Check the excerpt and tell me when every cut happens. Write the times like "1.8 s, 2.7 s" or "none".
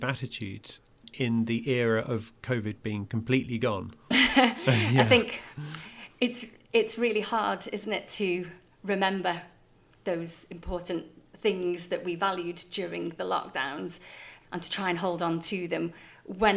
4.1 s